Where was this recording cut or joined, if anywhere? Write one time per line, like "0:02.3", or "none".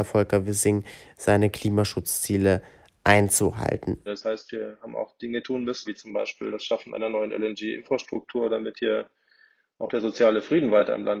0:04.1
0:05.8